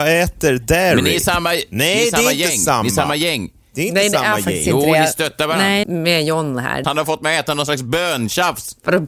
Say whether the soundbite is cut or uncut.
cut